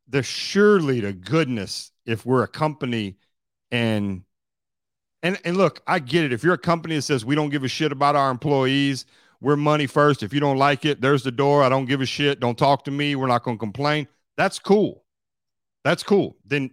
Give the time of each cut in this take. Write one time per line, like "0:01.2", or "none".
none